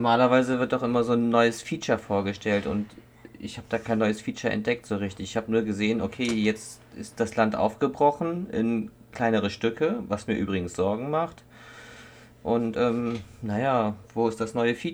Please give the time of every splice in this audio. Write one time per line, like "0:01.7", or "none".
none